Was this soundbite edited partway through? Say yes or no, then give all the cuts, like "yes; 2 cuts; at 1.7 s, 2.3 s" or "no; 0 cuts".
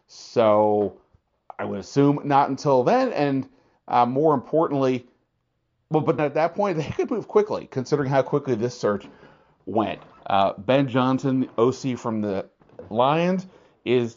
yes; 1 cut; at 6.2 s